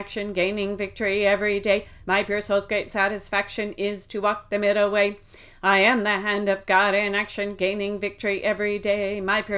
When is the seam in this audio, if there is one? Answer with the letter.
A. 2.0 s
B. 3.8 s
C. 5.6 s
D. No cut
D